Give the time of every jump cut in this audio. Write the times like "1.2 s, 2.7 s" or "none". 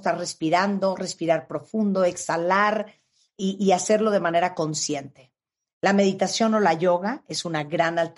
none